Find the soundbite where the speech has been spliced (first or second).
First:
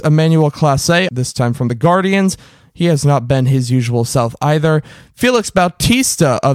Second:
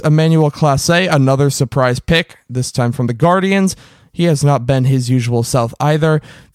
first